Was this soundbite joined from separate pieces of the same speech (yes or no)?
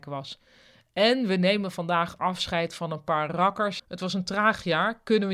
yes